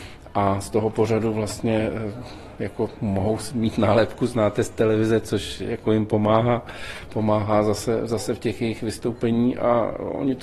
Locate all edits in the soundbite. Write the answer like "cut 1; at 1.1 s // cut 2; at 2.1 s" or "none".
none